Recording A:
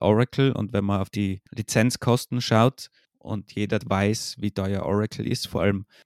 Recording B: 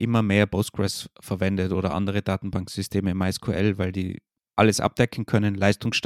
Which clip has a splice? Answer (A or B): A